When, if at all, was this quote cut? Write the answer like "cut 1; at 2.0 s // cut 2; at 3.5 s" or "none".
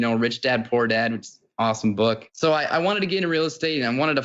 none